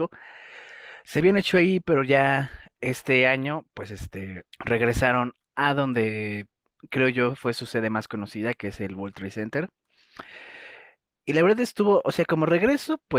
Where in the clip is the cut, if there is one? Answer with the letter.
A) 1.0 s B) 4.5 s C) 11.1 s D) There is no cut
B